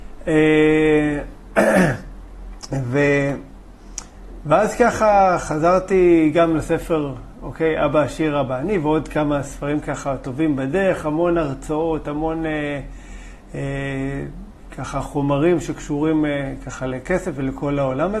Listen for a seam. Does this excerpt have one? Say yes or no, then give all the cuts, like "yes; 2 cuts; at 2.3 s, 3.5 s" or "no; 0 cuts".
no; 0 cuts